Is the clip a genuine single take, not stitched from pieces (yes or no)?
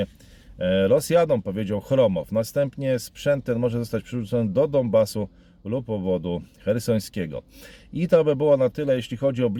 yes